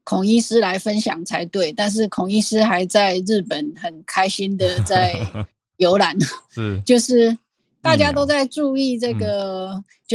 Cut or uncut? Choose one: uncut